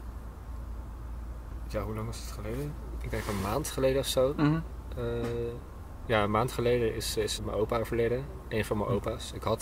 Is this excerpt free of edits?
no; 1 cut; at 7.4 s

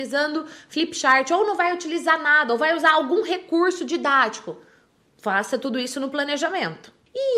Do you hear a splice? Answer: no; 0 cuts

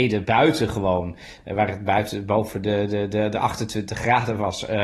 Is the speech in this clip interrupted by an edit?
no; 0 cuts

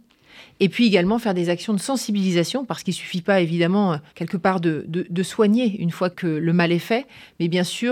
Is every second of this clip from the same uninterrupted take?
no; 2 cuts; at 4.1 s, 6.1 s

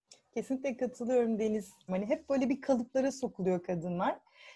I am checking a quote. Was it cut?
yes; 1 cut; at 1.9 s

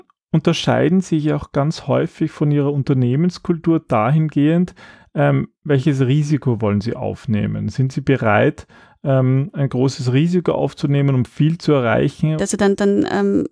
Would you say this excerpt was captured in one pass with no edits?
no; 1 cut; at 12.4 s

